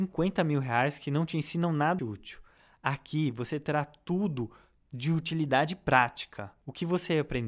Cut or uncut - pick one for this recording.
cut